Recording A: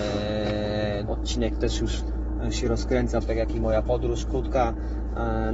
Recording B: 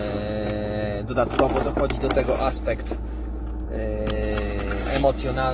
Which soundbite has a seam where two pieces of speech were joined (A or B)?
A